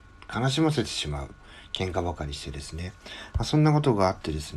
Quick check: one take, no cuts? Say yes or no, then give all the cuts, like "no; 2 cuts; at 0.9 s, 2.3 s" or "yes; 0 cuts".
yes; 0 cuts